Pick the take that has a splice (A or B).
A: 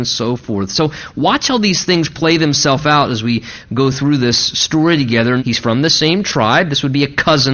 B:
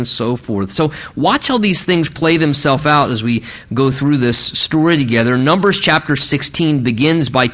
A